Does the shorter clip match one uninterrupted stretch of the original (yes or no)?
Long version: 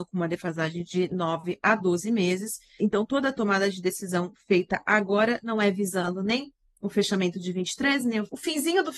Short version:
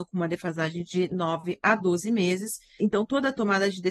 yes